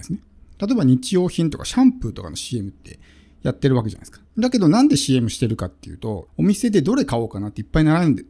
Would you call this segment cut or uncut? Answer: cut